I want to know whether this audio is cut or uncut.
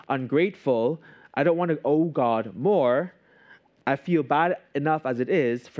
uncut